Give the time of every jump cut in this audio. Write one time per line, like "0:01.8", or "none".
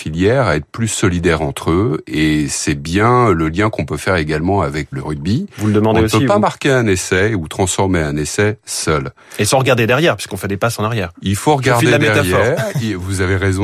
0:04.9